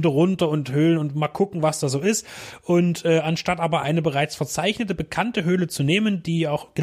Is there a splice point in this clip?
no; 0 cuts

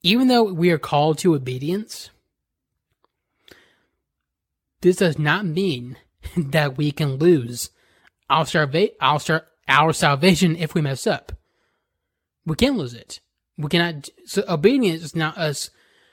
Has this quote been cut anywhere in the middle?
no; 0 cuts

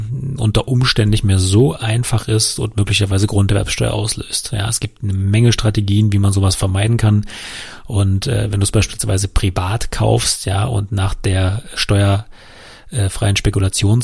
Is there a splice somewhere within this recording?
yes; 1 cut; at 11.8 s

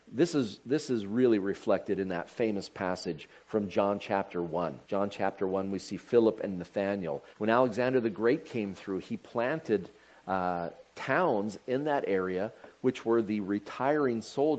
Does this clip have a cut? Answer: yes; 2 cuts; at 4.8 s, 7.3 s

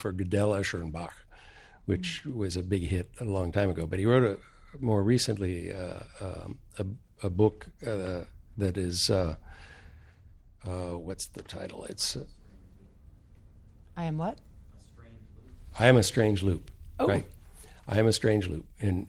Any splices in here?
no; 0 cuts

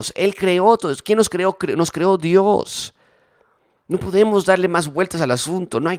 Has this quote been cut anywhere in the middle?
no; 0 cuts

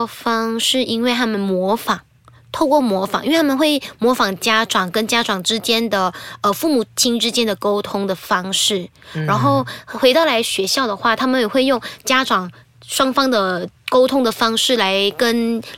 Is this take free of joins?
yes; 0 cuts

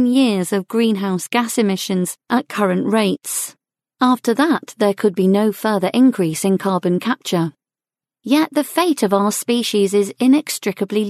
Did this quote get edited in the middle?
no; 0 cuts

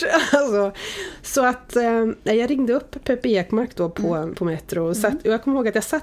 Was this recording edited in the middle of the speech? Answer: no; 0 cuts

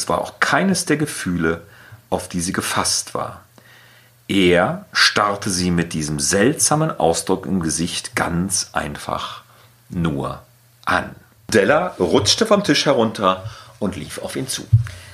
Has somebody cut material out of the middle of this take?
no; 0 cuts

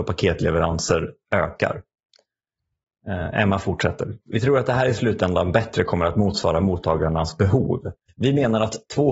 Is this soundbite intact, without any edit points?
no; 1 cut; at 8.1 s

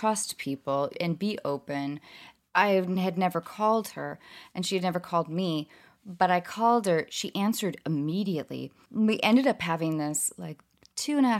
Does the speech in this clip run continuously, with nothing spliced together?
no; 1 cut; at 2.4 s

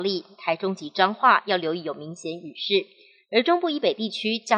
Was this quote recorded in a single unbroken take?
no; 1 cut; at 3.2 s

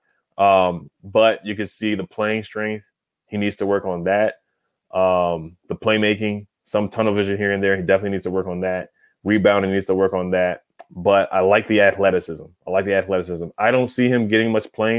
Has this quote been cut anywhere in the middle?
no; 0 cuts

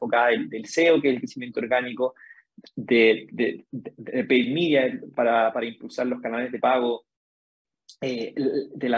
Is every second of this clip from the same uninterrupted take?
yes; 0 cuts

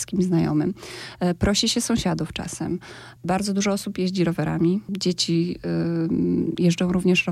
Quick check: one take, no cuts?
yes; 0 cuts

